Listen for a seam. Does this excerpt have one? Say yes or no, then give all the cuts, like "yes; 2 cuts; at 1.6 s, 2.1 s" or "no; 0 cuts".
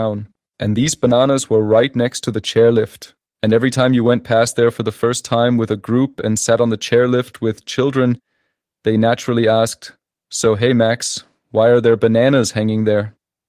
no; 0 cuts